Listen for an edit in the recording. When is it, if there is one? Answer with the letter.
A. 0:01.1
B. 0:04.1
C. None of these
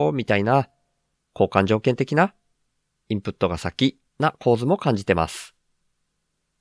B